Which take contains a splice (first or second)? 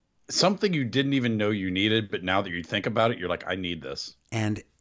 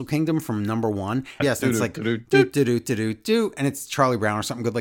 second